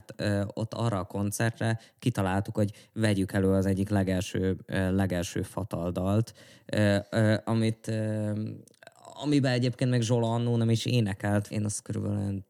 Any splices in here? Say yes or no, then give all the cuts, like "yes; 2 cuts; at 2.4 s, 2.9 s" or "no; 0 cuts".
yes; 1 cut; at 11.5 s